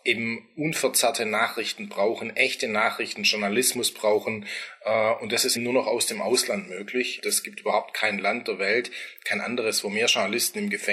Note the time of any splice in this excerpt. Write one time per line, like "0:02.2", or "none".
0:05.6
0:07.2